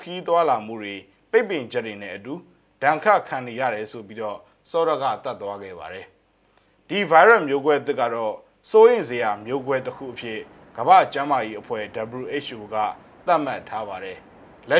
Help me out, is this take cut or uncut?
uncut